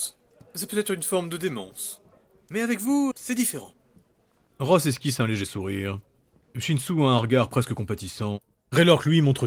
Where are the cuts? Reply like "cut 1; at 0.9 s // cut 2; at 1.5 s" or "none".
cut 1; at 3.1 s